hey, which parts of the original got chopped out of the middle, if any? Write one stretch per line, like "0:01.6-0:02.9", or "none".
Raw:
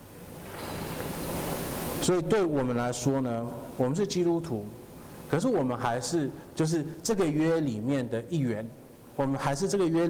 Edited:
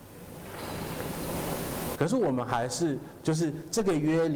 0:01.9-0:05.3